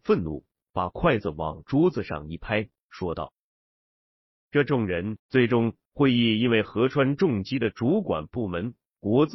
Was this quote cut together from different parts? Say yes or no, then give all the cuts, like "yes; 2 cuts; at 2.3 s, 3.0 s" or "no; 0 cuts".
yes; 1 cut; at 5.2 s